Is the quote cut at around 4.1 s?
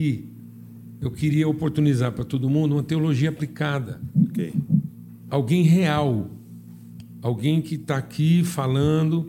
no; 0 cuts

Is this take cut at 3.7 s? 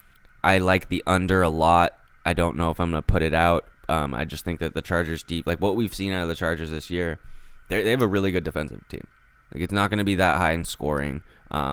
no; 0 cuts

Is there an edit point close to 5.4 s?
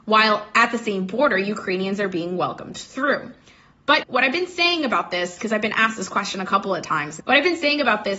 no; 2 cuts; at 4.0 s, 7.2 s

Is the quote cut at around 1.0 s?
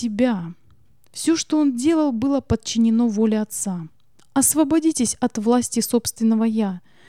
no; 1 cut; at 4.2 s

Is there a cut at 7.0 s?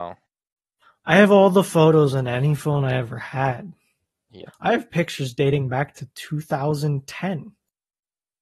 no; 1 cut; at 4.5 s

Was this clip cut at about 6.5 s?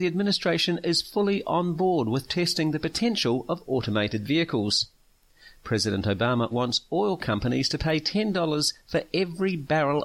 yes; 1 cut; at 6.5 s

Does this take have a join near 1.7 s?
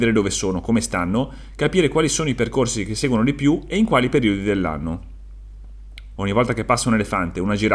no; 1 cut; at 6.2 s

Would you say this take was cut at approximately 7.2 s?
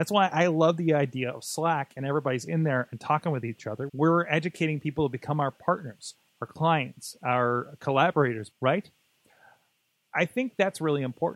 no; 2 cuts; at 3.9 s, 8.5 s

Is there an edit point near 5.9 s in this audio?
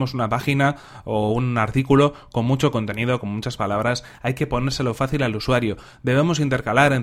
no; 0 cuts

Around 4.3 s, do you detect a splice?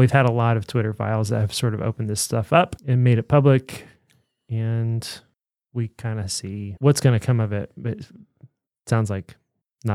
no; 0 cuts

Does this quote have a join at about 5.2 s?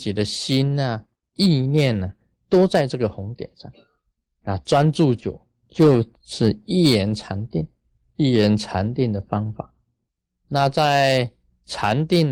yes; 1 cut; at 5.2 s

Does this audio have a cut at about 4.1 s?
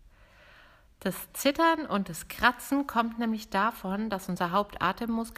no; 0 cuts

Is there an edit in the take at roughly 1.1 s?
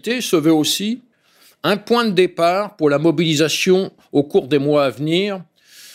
no; 0 cuts

